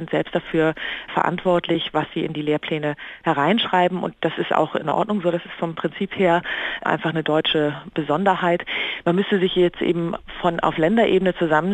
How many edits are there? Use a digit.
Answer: 1